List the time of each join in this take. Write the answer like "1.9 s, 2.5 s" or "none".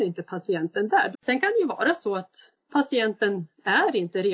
1.1 s